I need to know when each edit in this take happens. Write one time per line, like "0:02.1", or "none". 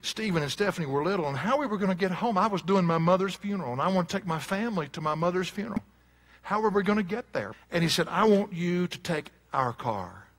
0:07.5

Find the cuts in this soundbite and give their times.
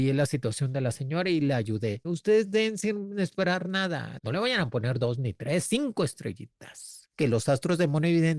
0:02.0
0:04.2

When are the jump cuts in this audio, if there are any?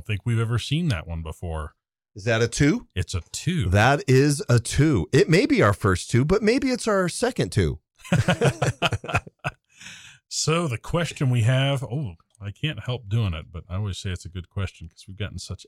none

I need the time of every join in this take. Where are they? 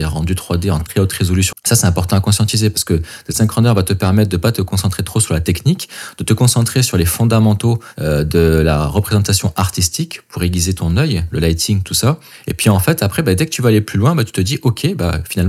0:01.5
0:11.3

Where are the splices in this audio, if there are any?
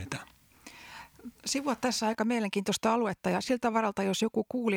none

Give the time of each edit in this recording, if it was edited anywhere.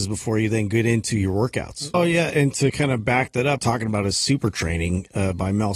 0:01.9
0:03.6

